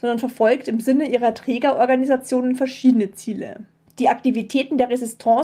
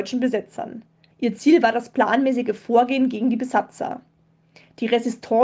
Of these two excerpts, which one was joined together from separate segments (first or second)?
second